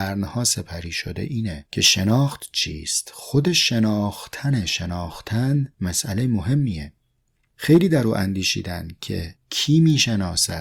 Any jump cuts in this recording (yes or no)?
no